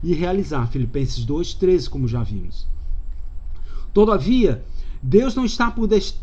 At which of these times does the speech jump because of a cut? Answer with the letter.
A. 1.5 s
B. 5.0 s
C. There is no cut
C